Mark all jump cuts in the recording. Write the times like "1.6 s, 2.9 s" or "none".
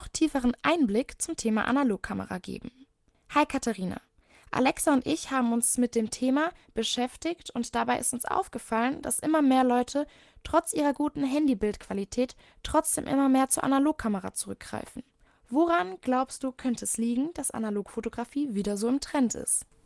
none